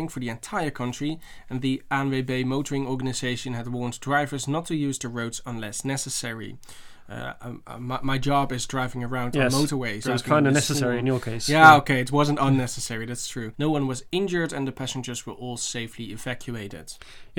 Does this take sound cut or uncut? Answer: cut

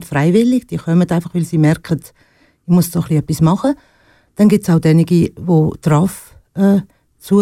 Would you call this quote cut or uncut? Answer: uncut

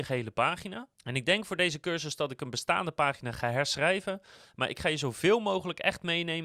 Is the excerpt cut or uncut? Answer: cut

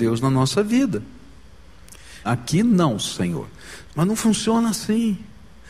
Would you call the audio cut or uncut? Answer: cut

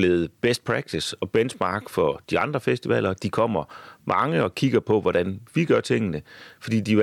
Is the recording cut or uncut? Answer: uncut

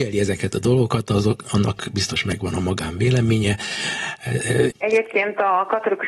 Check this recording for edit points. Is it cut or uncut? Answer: cut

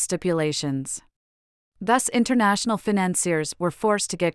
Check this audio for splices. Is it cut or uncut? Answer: cut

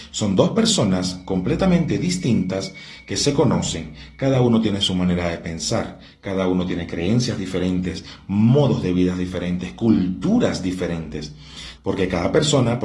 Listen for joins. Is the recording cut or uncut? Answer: cut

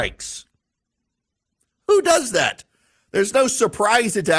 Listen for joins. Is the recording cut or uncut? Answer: uncut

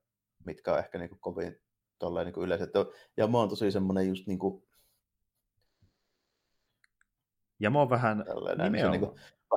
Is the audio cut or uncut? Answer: cut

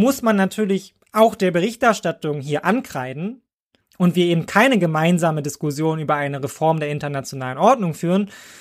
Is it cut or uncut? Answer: cut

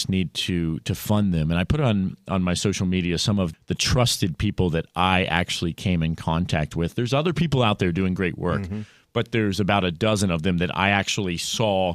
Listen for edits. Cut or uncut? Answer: cut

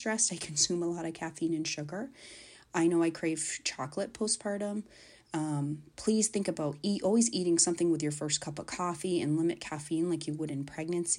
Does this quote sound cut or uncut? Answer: uncut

